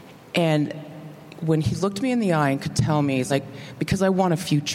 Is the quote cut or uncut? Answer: uncut